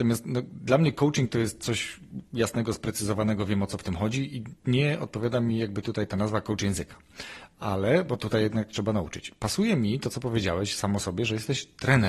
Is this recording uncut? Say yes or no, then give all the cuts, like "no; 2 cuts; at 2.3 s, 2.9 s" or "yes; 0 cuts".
yes; 0 cuts